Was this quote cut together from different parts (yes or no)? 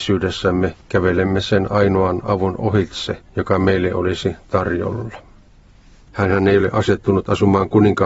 yes